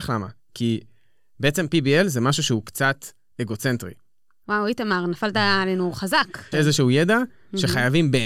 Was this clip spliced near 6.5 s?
yes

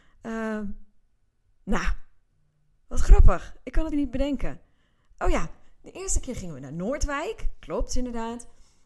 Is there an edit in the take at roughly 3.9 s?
yes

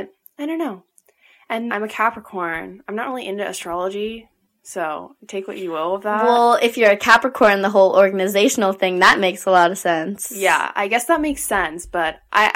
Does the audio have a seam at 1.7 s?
yes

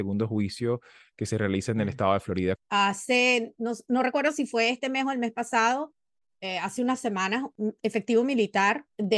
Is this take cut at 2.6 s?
yes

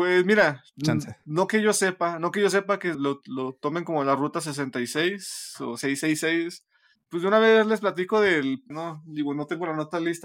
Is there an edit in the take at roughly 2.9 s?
yes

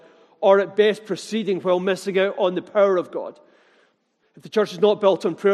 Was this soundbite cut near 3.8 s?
no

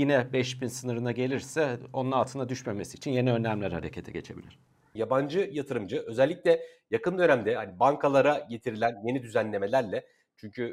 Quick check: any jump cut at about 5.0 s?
yes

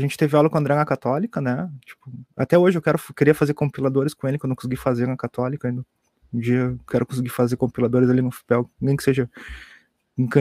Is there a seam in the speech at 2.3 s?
yes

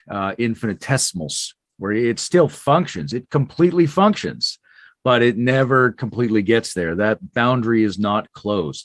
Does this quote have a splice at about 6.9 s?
no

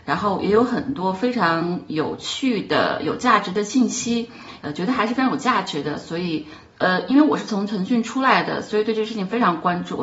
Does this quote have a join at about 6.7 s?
yes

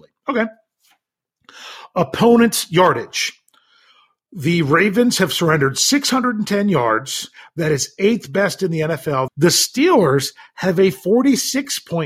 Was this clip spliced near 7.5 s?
no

